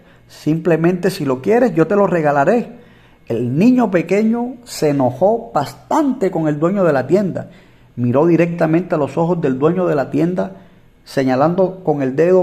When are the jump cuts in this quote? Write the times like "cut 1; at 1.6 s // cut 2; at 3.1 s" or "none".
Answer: none